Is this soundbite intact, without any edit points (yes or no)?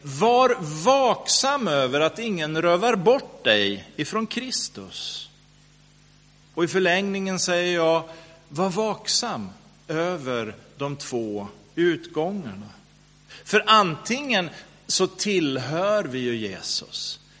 yes